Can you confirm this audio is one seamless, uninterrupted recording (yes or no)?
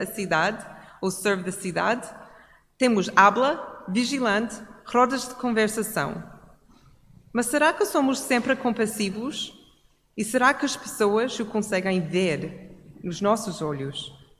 yes